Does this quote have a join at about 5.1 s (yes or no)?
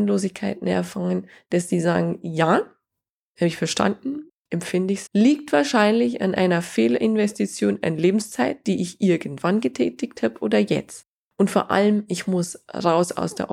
yes